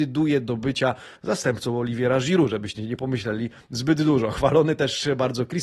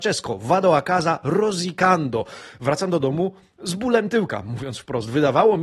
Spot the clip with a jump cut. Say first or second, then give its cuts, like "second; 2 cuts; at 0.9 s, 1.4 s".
first; 1 cut; at 1.2 s